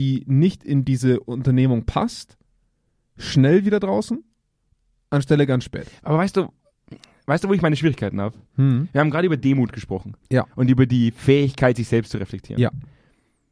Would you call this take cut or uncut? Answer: uncut